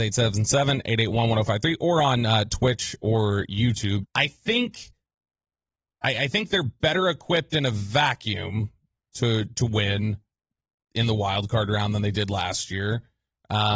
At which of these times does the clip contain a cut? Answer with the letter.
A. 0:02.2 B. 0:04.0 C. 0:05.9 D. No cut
B